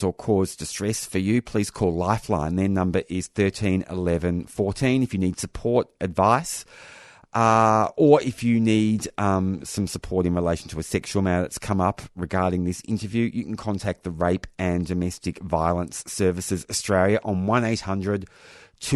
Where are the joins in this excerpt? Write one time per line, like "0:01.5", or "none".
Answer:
none